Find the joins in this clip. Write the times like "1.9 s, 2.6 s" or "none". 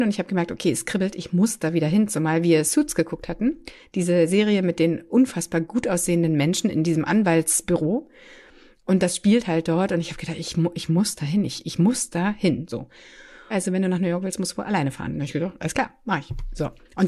13.5 s